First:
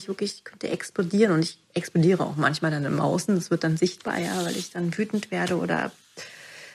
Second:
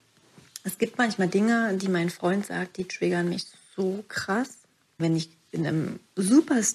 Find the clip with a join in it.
second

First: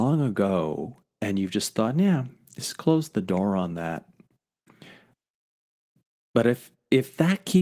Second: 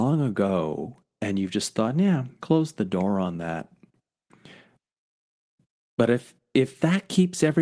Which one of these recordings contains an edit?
second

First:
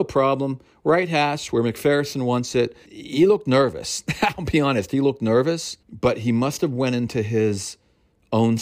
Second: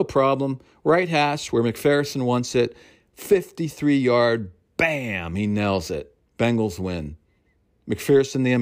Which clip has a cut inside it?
first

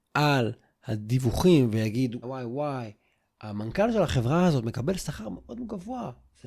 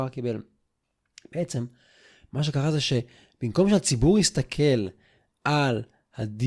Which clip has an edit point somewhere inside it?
first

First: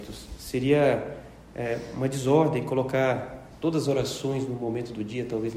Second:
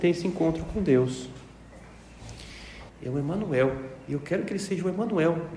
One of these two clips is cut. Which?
second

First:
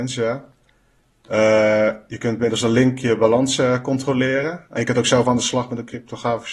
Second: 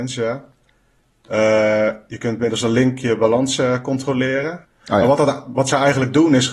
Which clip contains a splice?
second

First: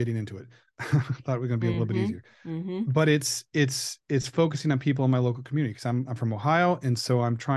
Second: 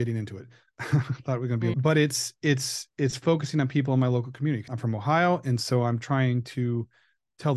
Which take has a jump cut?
second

